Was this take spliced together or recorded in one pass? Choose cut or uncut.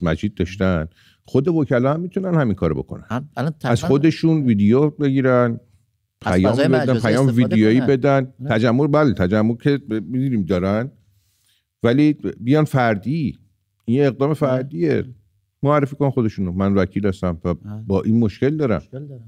uncut